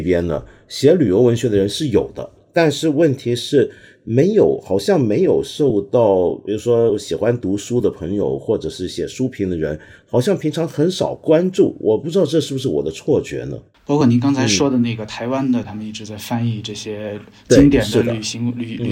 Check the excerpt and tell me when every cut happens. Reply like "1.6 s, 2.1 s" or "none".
13.7 s, 15.6 s